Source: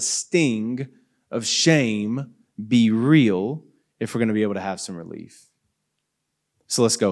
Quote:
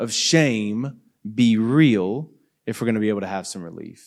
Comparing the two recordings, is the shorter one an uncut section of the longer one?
yes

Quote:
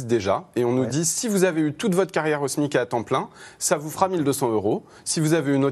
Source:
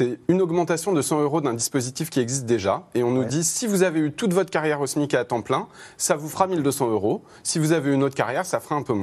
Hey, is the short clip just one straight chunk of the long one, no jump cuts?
yes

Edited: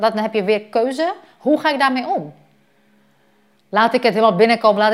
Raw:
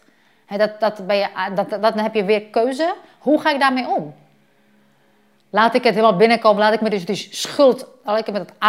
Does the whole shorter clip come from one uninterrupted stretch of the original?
yes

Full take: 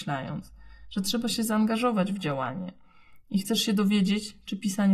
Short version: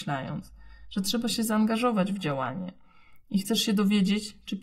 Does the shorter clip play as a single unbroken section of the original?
yes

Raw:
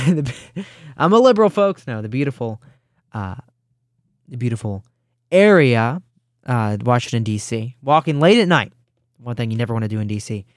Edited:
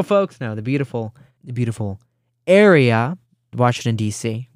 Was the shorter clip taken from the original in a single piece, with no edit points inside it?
no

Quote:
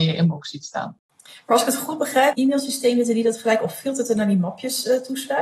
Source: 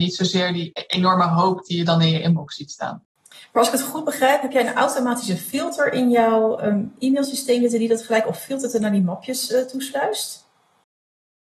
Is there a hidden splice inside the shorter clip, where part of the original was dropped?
yes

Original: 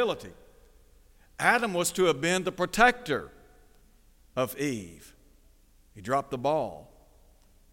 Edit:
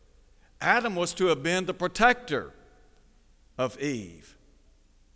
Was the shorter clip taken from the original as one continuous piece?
yes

